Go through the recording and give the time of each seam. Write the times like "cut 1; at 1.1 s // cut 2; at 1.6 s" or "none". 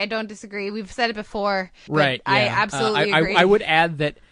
cut 1; at 1.9 s